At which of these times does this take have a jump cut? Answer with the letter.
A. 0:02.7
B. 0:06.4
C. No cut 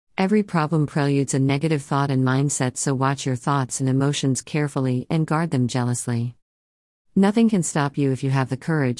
C